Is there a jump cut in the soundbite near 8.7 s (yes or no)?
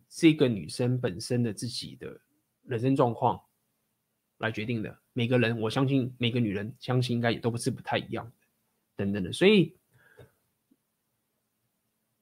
no